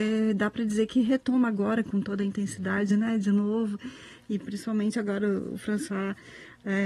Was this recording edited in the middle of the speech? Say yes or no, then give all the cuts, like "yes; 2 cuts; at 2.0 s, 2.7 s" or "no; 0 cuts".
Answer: no; 0 cuts